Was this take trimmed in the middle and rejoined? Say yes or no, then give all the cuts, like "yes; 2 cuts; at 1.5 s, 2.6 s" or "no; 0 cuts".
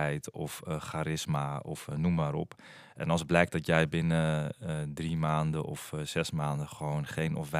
yes; 1 cut; at 2.9 s